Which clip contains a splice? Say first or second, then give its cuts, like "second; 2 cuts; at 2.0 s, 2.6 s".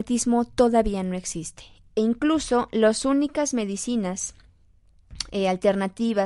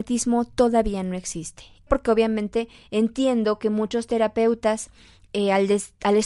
second; 1 cut; at 1.9 s